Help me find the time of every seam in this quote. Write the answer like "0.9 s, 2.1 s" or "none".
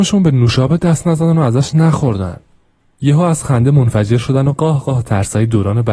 none

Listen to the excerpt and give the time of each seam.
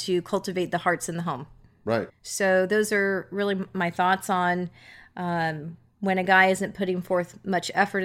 2.1 s

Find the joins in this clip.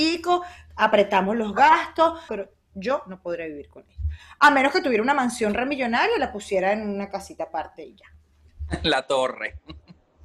2.3 s

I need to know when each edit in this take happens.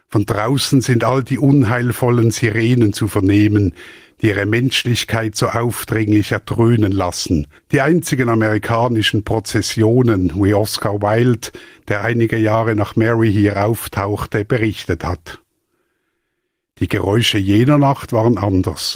7.6 s

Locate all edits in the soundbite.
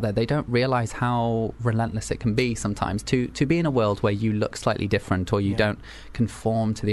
none

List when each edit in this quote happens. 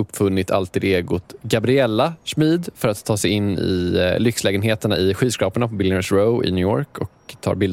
none

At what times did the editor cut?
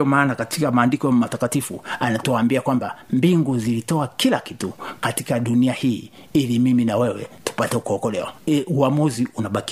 none

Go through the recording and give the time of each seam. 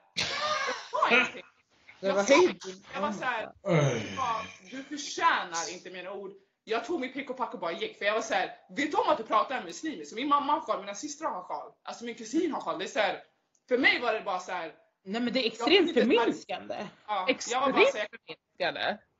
none

